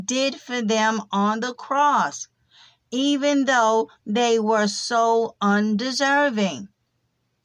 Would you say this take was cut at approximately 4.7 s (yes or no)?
no